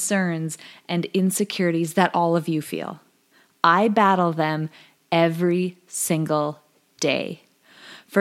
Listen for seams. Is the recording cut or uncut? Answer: uncut